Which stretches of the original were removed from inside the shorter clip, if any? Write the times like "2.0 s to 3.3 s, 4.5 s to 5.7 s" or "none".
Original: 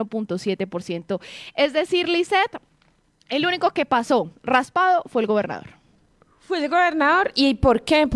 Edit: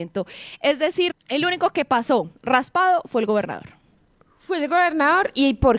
2.0 s to 3.1 s